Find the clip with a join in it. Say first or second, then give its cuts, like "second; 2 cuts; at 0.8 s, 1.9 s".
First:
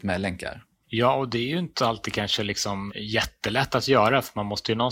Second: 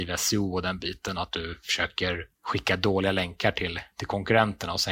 first; 1 cut; at 2.9 s